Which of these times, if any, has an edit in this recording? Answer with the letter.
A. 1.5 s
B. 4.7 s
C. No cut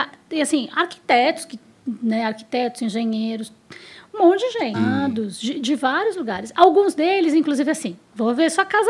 B